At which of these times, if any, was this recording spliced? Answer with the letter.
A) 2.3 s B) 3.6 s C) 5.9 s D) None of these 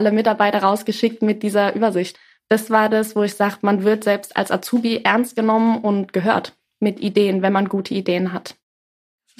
D